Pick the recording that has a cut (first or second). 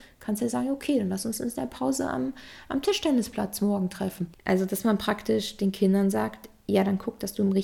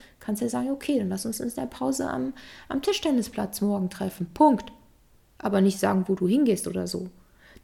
first